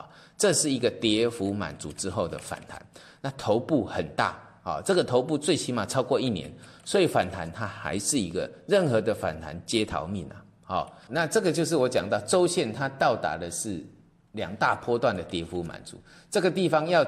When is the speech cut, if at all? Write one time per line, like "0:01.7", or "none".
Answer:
0:11.1